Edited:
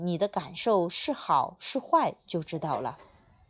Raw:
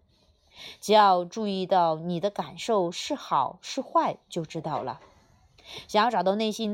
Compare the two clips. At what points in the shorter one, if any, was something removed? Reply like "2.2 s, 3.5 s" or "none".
none